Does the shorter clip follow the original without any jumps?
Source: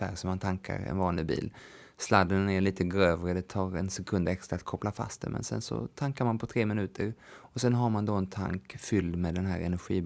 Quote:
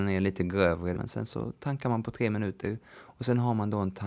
no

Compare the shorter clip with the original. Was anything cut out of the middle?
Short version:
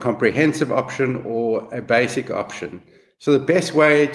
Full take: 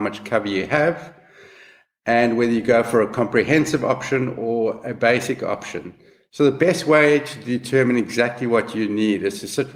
no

